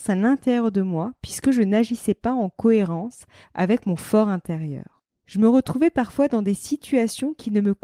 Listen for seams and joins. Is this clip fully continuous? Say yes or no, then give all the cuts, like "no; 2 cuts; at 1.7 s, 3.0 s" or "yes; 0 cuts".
yes; 0 cuts